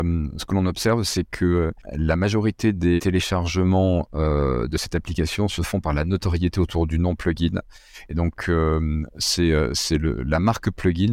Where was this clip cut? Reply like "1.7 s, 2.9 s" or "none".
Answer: 3.0 s